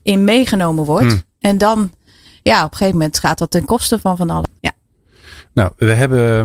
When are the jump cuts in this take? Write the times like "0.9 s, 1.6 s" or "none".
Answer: 4.6 s